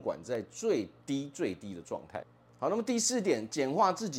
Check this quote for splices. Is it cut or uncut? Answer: uncut